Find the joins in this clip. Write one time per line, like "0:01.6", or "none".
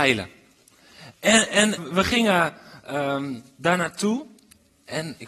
0:01.8